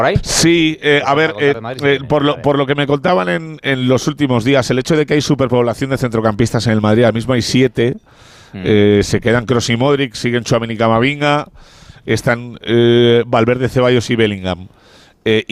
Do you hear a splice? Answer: no; 0 cuts

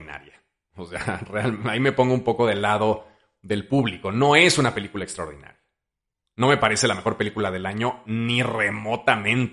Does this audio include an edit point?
no; 0 cuts

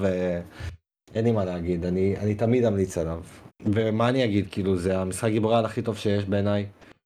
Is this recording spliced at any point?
yes; 1 cut; at 3.5 s

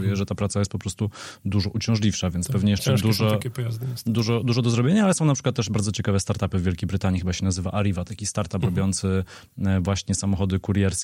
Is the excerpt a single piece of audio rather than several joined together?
yes; 0 cuts

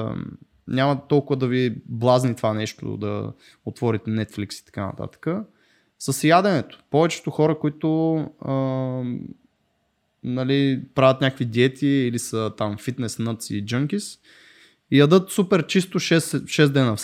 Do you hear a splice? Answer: no; 0 cuts

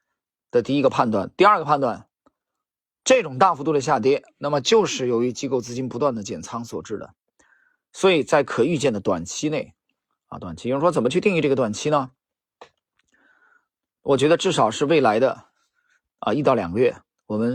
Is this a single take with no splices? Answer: yes; 0 cuts

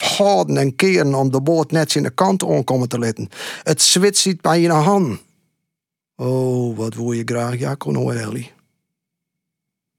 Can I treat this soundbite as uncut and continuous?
no; 1 cut; at 8.1 s

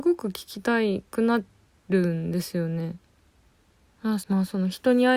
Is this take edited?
yes; 1 cut; at 4.2 s

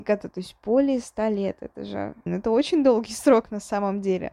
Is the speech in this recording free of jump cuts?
no; 1 cut; at 2.3 s

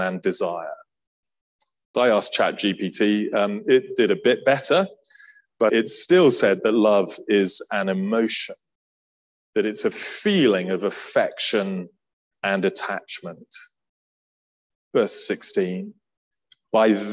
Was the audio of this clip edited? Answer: yes; 3 cuts; at 1.9 s, 5.7 s, 14.7 s

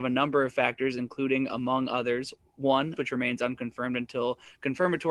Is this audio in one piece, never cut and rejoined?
no; 1 cut; at 3.0 s

